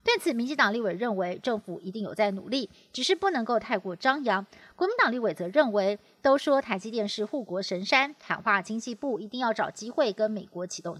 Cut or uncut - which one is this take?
uncut